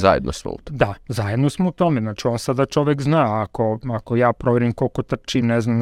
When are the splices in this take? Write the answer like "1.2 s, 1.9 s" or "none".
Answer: none